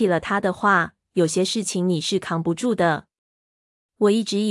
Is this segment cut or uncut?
uncut